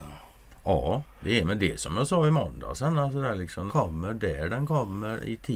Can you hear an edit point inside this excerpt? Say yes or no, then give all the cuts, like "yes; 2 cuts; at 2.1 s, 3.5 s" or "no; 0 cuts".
yes; 1 cut; at 3.7 s